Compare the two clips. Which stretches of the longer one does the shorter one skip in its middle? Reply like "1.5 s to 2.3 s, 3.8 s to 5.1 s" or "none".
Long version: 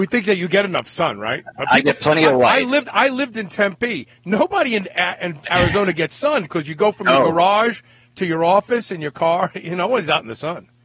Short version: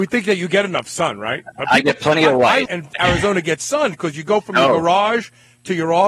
2.7 s to 5.2 s